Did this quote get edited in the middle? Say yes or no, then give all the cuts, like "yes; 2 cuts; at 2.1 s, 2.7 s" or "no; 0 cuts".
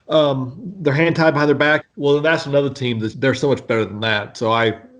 yes; 2 cuts; at 1.8 s, 3.1 s